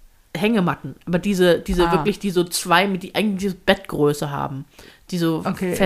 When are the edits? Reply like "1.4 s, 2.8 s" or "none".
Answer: none